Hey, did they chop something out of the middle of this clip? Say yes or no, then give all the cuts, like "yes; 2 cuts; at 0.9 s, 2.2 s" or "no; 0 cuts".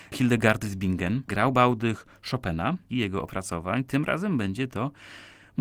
yes; 2 cuts; at 1.2 s, 2.9 s